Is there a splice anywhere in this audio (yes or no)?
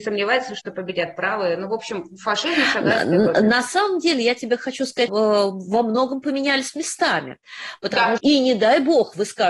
yes